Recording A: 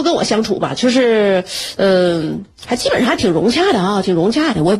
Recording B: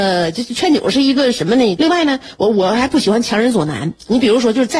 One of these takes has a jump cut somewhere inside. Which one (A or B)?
B